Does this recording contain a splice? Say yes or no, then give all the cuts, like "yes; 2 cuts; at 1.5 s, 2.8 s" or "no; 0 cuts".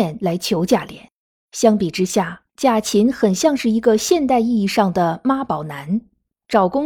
yes; 1 cut; at 2.5 s